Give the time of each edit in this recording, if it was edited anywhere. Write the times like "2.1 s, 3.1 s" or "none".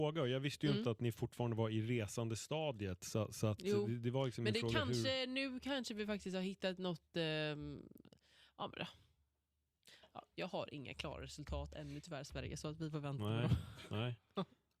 none